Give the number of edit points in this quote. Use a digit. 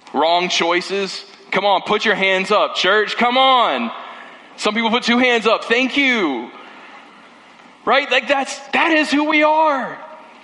0